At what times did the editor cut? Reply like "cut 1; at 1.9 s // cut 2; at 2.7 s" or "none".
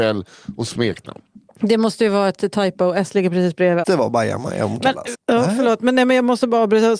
cut 1; at 3.8 s // cut 2; at 5.1 s